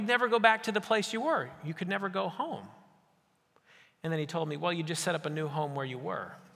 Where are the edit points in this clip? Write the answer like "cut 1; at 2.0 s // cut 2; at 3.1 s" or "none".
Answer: none